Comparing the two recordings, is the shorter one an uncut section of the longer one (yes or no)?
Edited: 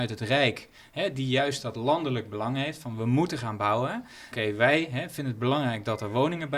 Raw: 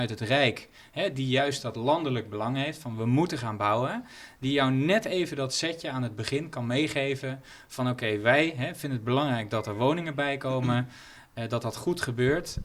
no